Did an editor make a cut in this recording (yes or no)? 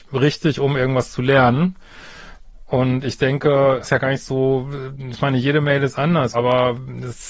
yes